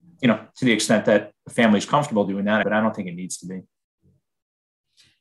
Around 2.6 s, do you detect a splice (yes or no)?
yes